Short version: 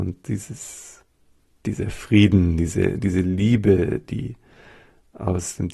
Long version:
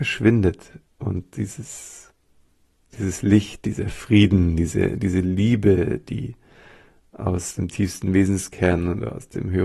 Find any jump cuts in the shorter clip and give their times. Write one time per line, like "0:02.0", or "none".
0:01.6

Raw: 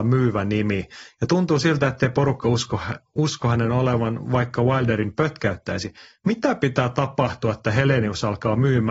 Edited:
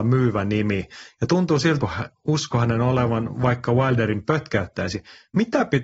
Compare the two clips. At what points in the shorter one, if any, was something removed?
0:01.8

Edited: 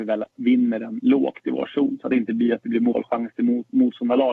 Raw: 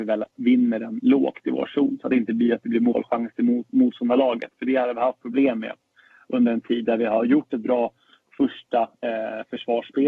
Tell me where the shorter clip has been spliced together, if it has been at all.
none

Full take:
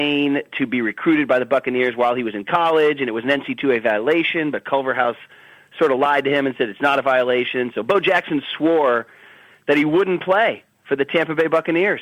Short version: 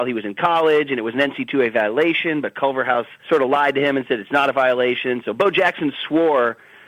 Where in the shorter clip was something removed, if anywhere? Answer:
0:03.2

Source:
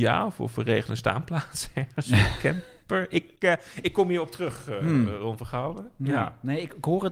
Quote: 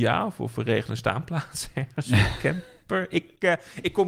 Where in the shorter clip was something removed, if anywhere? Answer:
none

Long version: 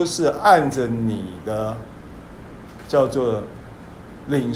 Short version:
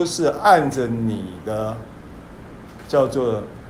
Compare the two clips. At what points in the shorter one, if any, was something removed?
none

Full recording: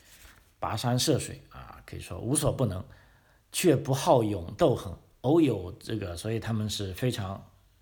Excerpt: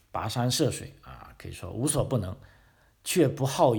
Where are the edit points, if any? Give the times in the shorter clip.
none

